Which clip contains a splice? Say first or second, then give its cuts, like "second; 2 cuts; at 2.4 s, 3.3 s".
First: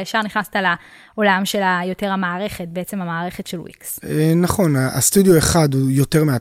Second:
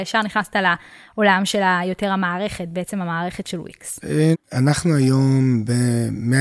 second; 1 cut; at 4.3 s